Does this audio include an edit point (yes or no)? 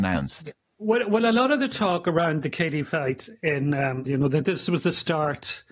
yes